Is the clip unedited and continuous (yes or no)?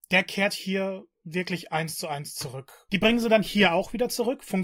no